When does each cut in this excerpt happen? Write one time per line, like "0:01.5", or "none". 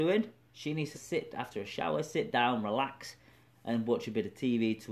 0:00.9